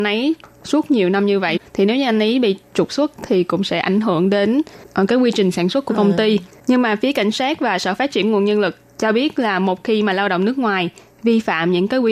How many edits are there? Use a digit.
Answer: 0